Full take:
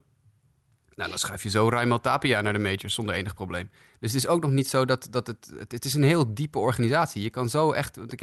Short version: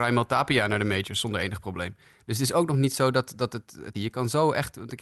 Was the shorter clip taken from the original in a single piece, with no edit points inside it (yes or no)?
no